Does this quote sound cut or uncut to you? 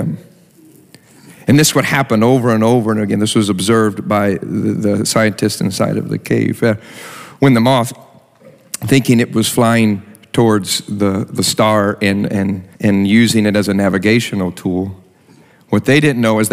cut